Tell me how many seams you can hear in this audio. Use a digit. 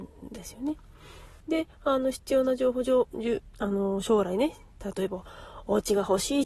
1